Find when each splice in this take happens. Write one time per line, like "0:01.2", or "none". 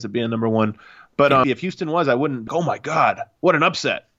0:01.4
0:02.5